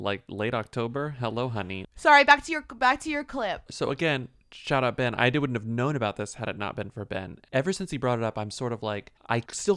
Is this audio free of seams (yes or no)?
no